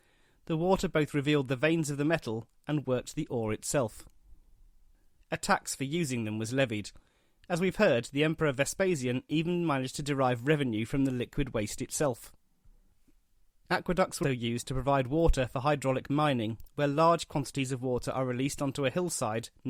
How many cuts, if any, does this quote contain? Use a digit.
2